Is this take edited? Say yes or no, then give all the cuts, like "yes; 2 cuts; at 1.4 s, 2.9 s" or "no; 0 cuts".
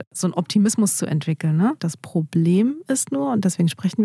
yes; 1 cut; at 1.8 s